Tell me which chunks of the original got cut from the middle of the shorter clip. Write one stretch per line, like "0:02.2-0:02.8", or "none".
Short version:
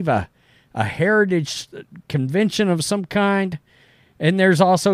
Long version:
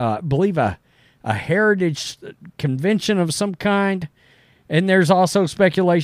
none